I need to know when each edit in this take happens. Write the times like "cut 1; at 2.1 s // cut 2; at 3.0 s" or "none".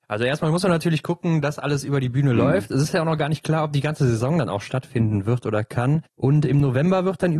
none